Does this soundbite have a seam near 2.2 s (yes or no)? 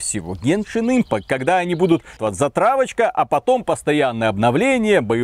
yes